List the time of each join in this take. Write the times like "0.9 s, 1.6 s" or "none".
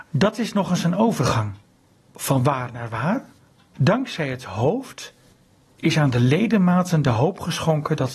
3.7 s